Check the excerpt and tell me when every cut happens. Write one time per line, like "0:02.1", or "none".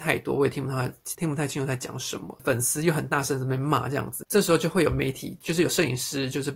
0:01.1